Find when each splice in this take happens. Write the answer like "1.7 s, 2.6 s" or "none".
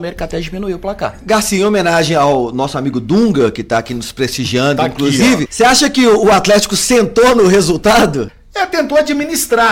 5.5 s, 8.3 s